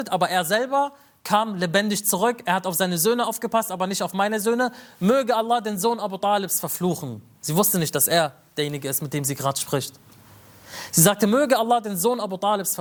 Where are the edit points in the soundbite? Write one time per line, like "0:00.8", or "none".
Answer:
none